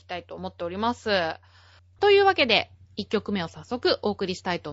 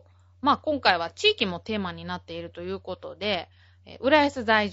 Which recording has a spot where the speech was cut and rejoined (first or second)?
first